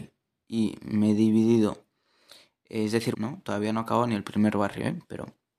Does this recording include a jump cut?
yes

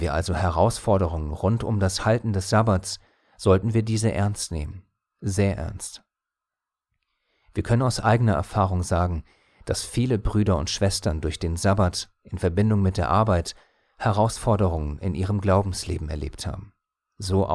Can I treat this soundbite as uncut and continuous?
yes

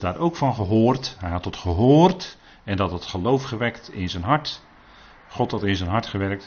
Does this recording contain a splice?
no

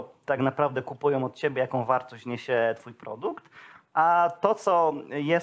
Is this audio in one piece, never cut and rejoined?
yes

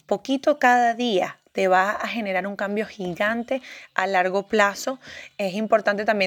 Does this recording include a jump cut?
no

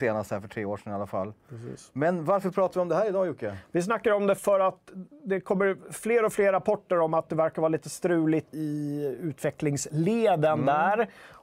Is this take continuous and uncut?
no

